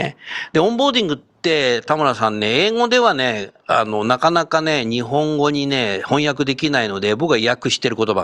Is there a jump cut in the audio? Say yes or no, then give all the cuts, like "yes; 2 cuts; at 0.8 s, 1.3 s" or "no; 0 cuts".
yes; 1 cut; at 3.6 s